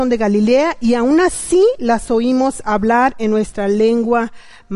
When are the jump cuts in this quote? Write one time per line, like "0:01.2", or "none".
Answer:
none

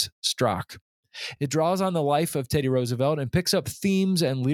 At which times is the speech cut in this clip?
none

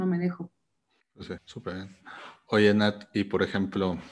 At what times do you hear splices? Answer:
0:01.4

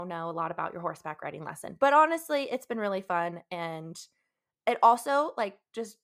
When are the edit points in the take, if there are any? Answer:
none

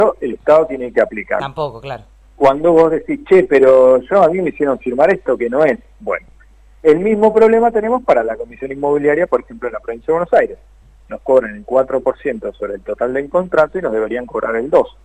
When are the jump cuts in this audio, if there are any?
0:01.4

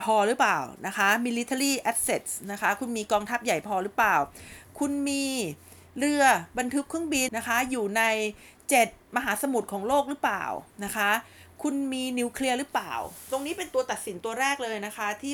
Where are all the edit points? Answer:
0:07.3

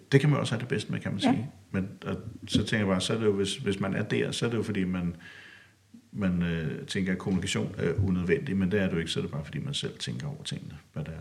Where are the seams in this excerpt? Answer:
none

